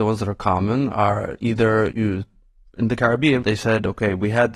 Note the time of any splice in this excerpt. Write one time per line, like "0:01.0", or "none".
0:01.9
0:03.4

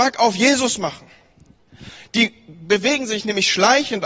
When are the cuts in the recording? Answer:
0:02.0

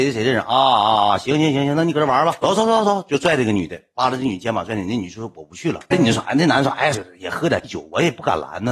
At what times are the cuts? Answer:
0:06.9

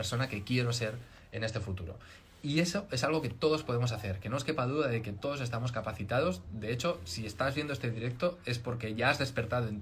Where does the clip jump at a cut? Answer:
none

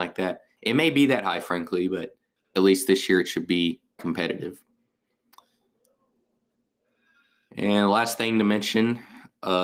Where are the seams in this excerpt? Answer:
0:02.4
0:04.0

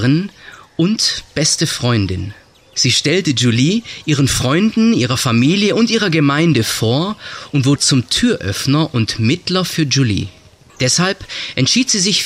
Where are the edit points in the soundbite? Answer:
0:07.8
0:10.7

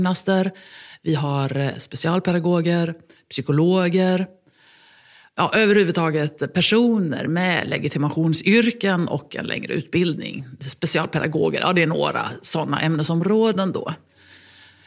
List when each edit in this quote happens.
none

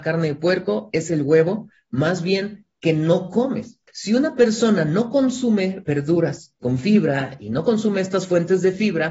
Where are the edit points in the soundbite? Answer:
0:06.6

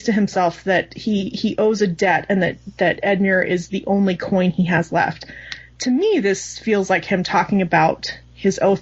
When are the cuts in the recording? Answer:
none

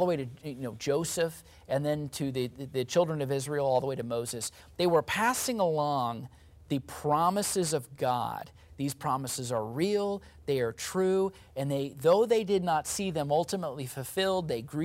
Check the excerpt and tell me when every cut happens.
none

